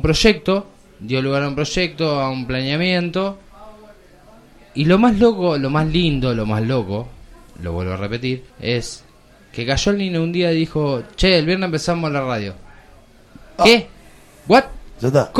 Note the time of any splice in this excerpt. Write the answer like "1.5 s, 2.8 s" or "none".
8.5 s